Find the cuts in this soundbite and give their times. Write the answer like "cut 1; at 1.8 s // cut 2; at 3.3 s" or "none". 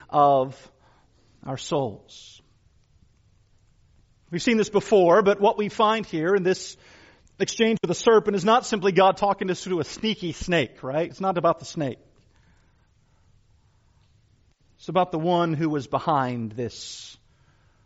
none